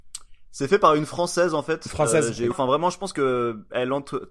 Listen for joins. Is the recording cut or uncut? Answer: cut